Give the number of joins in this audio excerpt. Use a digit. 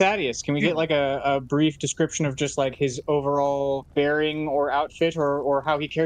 1